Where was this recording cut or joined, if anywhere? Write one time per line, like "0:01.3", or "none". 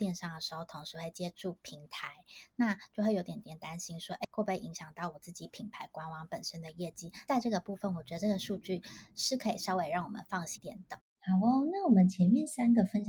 0:04.2
0:10.6